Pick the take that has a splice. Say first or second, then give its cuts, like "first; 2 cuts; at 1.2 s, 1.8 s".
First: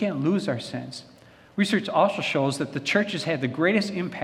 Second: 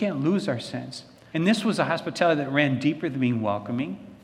second; 1 cut; at 1.3 s